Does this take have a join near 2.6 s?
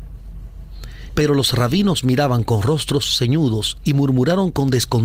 no; 1 cut; at 1.1 s

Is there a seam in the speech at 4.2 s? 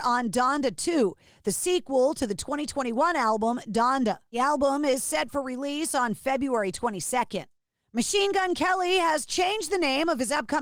no; 0 cuts

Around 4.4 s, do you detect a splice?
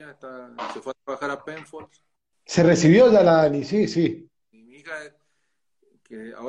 yes; 2 cuts; at 2.3 s, 4.4 s

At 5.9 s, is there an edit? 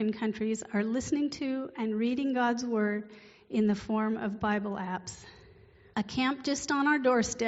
yes; 1 cut; at 5.9 s

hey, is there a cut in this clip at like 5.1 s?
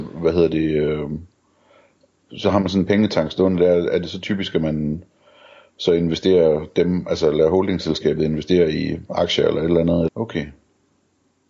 no; 1 cut; at 10.1 s

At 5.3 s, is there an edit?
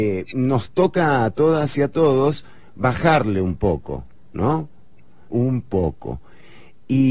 yes; 1 cut; at 5.3 s

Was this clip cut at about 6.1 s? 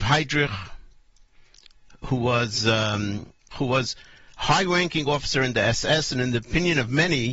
no; 1 cut; at 3.5 s

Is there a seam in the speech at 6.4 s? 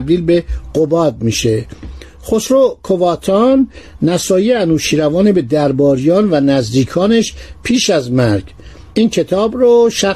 no; 1 cut; at 8.9 s

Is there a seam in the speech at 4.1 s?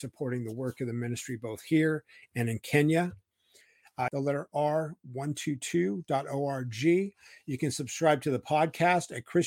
yes; 1 cut; at 4.1 s

